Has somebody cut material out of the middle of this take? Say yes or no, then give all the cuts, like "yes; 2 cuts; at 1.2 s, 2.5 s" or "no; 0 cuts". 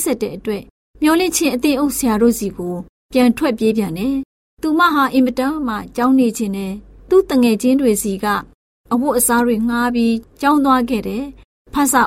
no; 0 cuts